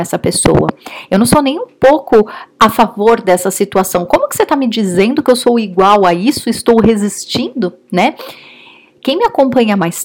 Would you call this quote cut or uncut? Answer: uncut